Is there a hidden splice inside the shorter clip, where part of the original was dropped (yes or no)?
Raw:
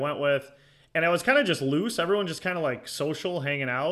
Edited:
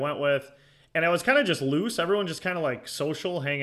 no